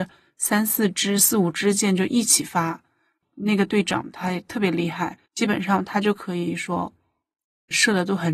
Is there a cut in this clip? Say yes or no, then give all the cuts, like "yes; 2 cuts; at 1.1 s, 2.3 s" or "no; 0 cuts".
yes; 1 cut; at 5.3 s